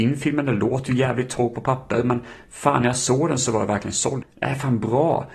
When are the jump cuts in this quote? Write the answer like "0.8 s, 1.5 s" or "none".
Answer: 4.2 s

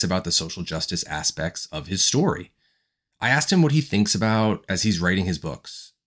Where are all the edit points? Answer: none

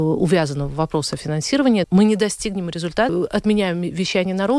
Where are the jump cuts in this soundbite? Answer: 1.8 s, 3.1 s

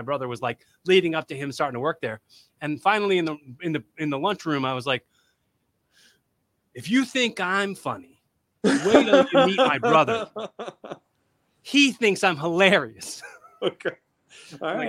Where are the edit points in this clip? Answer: none

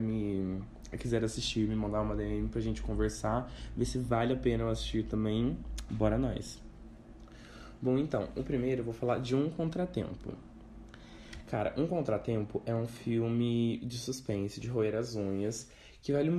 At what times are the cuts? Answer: none

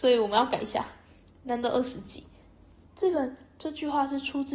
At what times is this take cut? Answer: 2.8 s

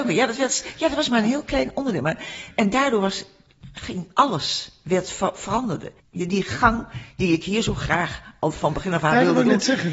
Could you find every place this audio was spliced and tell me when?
6.0 s

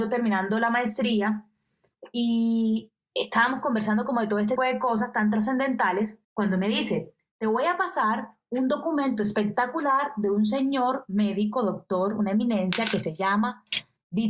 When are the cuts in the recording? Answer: 4.6 s, 6.2 s

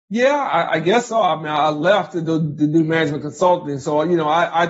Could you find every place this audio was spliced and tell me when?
none

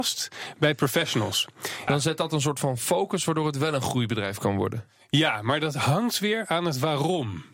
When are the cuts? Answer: 1.9 s

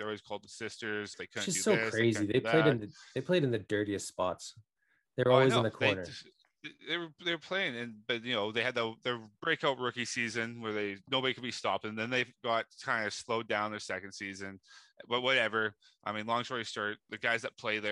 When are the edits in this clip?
1.1 s

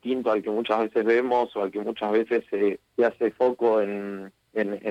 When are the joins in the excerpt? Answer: 2.9 s

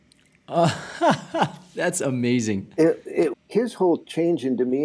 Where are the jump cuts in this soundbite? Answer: 3.3 s

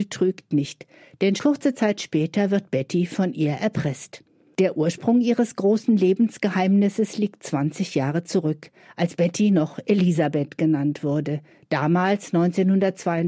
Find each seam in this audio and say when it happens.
1.4 s

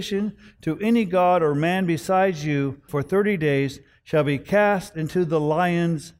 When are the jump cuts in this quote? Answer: 2.9 s

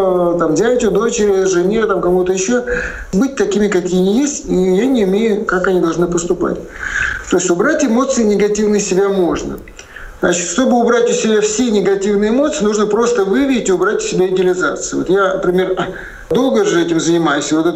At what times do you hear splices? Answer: 5.5 s, 10.2 s

